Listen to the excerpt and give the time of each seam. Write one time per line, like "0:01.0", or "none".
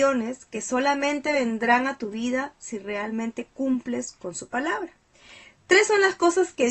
none